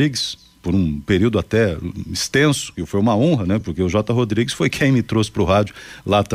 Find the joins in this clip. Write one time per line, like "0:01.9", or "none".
none